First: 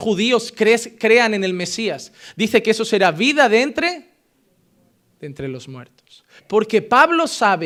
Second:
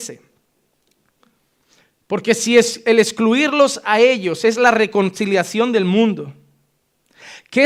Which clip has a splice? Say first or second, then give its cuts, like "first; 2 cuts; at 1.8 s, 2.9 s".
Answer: first; 1 cut; at 6.4 s